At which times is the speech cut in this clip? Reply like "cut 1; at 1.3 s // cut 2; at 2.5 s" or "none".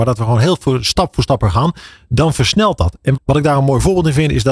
cut 1; at 3.2 s